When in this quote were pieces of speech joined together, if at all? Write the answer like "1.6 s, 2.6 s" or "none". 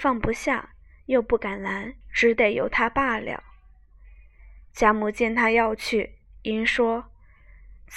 2.0 s